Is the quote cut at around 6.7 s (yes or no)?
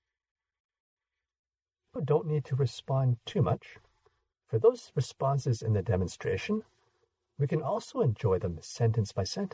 no